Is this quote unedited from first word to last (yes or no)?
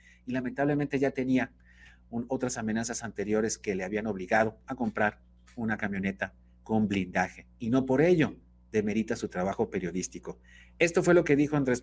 yes